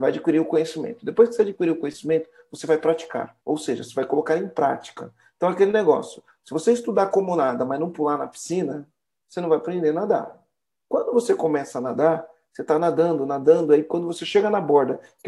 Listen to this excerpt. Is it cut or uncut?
cut